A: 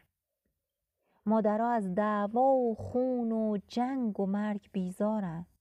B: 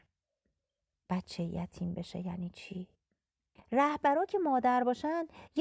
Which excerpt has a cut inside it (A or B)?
B